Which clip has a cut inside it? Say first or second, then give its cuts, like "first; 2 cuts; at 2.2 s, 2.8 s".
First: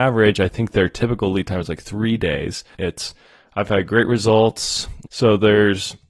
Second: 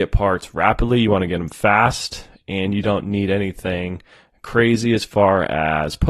first; 2 cuts; at 2.7 s, 5.1 s